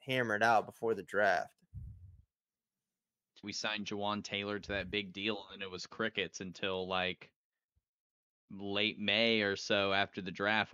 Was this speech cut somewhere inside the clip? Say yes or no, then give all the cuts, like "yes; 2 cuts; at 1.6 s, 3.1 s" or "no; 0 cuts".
yes; 1 cut; at 3.4 s